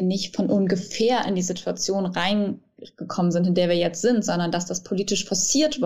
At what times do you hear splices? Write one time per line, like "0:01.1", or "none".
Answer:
none